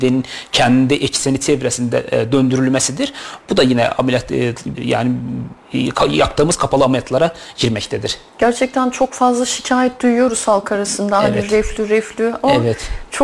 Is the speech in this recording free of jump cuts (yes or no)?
no